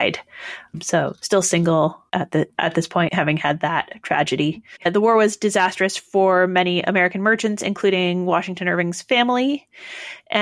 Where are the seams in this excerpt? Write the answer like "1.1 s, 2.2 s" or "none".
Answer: 3.1 s, 4.8 s